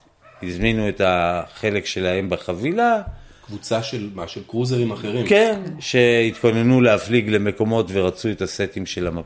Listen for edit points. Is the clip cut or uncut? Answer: uncut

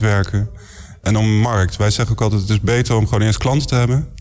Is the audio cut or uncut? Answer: uncut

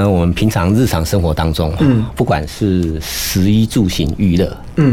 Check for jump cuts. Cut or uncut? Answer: uncut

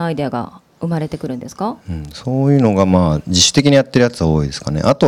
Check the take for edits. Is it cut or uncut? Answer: cut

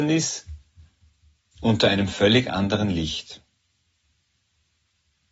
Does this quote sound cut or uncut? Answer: uncut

